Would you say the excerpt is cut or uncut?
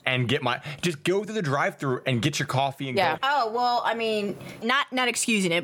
cut